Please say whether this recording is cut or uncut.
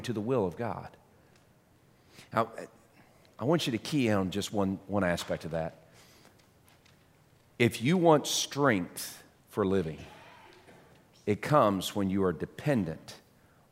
uncut